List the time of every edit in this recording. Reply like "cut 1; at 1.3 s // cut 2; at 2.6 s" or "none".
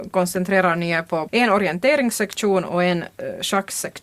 cut 1; at 1.3 s